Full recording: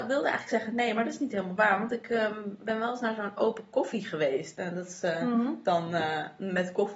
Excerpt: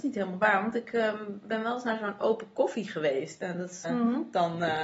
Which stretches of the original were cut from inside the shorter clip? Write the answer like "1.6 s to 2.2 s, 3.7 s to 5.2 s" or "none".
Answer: 5.0 s to 5.2 s